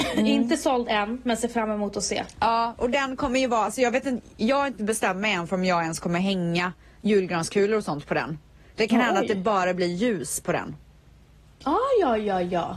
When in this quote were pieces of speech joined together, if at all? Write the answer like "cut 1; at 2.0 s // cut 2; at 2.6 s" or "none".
none